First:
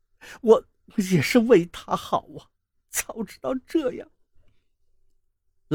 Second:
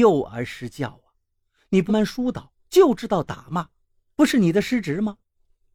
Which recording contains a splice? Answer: second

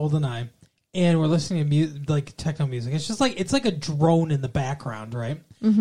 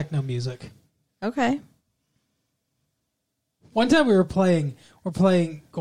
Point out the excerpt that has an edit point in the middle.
second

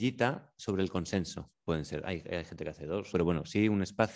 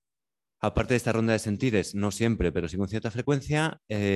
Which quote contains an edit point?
first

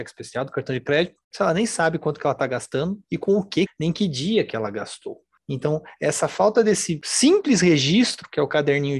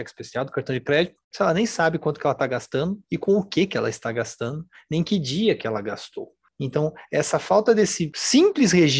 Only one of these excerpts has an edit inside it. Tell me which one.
first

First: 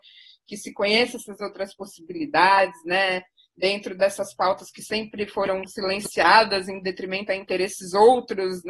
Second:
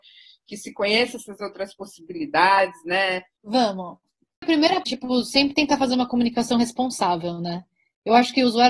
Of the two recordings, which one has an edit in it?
second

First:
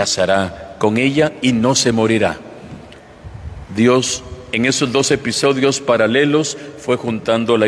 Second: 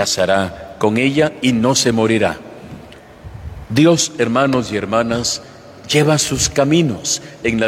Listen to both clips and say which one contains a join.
first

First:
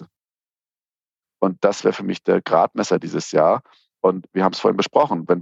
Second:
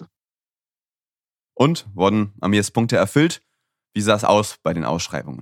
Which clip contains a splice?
first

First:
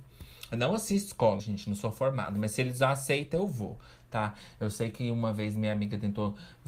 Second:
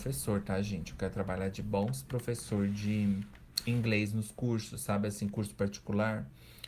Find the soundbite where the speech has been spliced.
first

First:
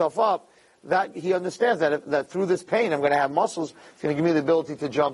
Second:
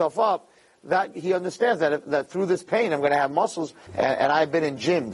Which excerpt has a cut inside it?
second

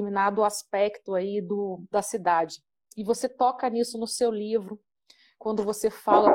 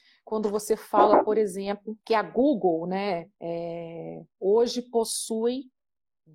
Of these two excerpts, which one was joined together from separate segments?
second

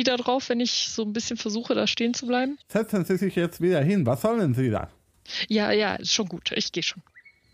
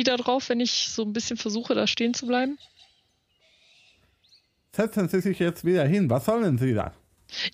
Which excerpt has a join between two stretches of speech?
first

